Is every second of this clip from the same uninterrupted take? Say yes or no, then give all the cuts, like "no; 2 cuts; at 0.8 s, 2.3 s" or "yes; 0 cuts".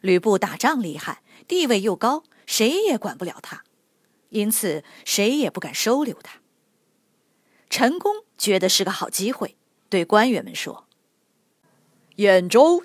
yes; 0 cuts